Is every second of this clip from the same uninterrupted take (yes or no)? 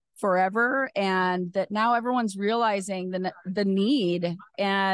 yes